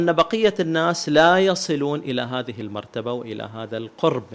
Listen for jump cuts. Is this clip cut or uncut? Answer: uncut